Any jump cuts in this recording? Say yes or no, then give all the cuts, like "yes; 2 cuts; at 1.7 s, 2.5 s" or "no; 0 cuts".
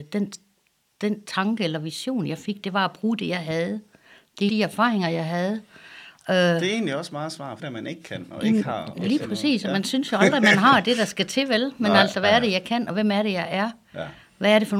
yes; 2 cuts; at 4.5 s, 7.6 s